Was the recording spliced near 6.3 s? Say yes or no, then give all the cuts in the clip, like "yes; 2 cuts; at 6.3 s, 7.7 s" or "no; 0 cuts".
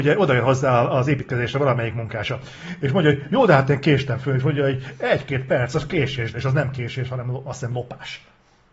yes; 1 cut; at 6.3 s